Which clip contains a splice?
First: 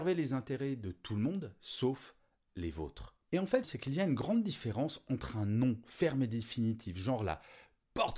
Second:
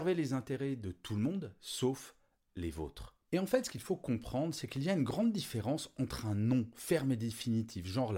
first; 1 cut; at 3.6 s

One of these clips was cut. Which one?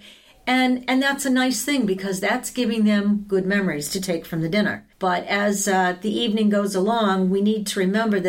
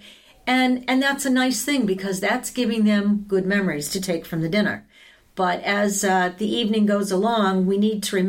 first; 1 cut; at 4.9 s

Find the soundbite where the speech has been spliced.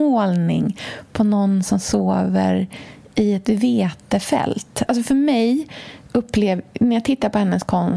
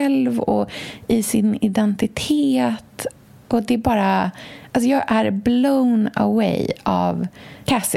first; 1 cut; at 4.9 s

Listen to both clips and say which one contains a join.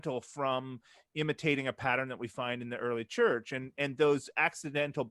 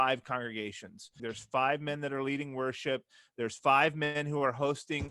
second; 1 cut; at 1.2 s

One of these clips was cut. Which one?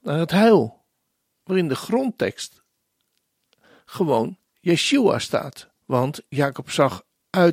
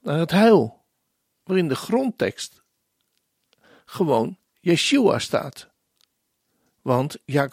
first; 1 cut; at 5.8 s

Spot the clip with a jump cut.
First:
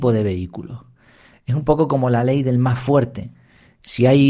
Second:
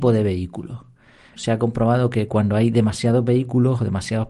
second; 1 cut; at 1.3 s

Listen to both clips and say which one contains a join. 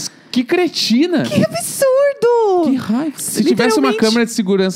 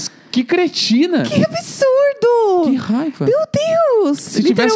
first; 1 cut; at 3.2 s

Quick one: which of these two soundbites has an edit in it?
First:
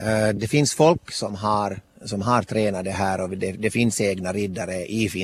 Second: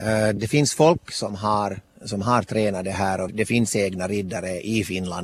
second; 1 cut; at 3.3 s

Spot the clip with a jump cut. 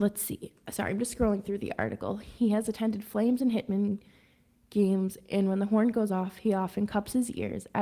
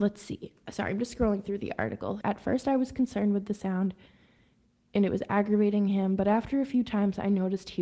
second; 1 cut; at 2.2 s

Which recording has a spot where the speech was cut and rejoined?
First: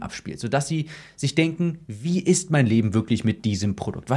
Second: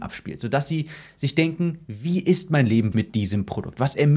second; 1 cut; at 2.9 s

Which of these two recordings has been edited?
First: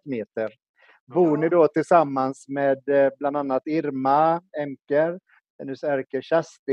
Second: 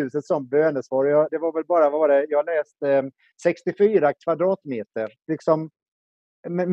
second; 2 cuts; at 1.3 s, 5.3 s

